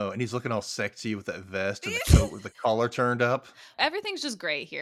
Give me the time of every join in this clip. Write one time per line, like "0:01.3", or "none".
0:03.7

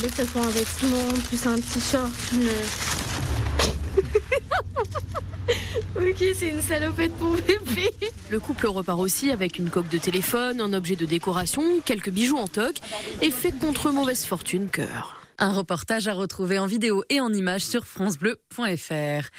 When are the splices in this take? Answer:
0:14.7

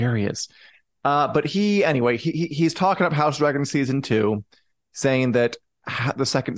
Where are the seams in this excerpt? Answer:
none

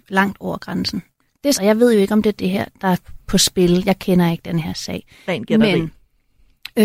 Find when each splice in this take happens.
0:01.5

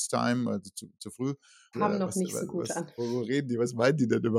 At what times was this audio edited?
0:01.7
0:03.0

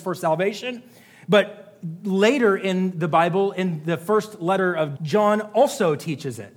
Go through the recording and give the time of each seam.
0:05.0

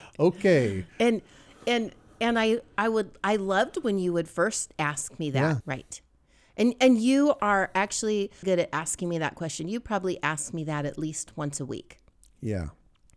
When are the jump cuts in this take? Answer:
0:05.6
0:08.4

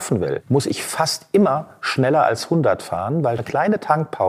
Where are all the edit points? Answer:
0:03.4

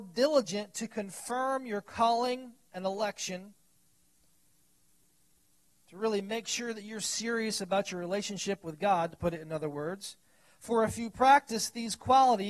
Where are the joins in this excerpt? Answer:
none

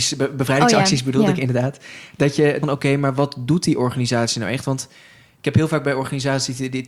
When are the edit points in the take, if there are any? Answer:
0:02.6

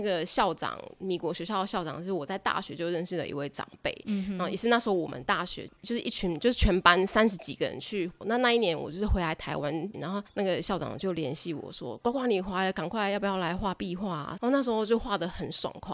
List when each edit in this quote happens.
0:08.2
0:09.9
0:14.4

